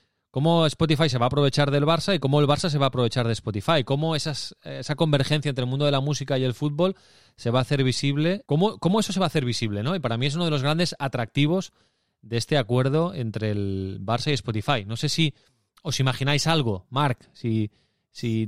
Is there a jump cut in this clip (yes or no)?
yes